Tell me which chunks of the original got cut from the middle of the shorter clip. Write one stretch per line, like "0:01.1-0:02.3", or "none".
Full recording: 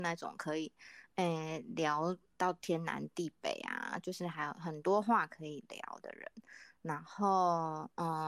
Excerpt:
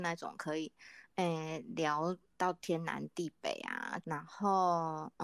0:04.0-0:06.8